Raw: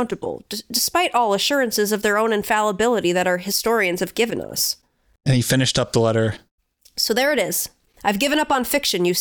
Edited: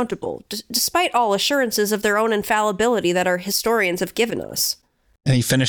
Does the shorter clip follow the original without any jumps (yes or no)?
yes